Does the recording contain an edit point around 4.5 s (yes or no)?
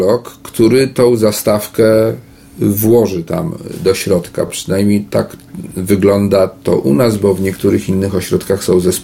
no